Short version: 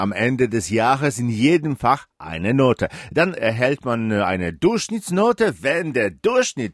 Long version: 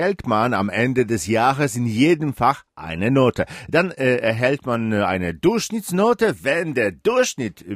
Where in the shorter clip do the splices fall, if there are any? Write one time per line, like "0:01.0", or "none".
0:03.4